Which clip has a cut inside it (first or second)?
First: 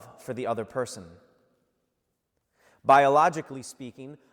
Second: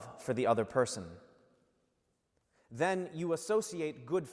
second